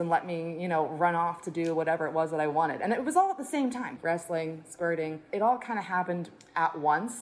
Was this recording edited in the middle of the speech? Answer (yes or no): yes